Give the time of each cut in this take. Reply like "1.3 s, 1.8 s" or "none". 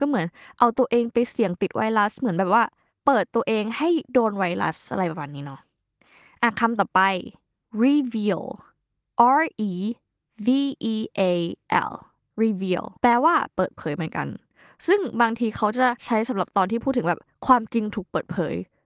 13.0 s